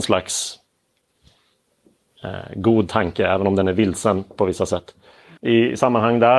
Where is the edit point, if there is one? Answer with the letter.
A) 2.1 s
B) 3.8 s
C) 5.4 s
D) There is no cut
C